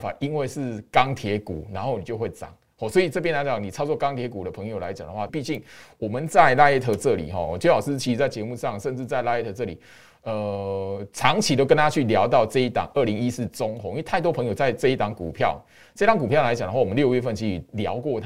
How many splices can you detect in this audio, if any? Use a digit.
1